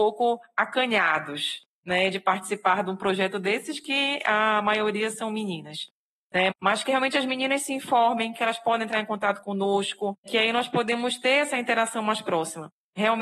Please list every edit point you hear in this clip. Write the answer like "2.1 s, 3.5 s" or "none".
6.5 s, 10.3 s